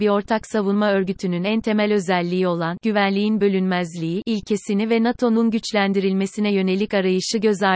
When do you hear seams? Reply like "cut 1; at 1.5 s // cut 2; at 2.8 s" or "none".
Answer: none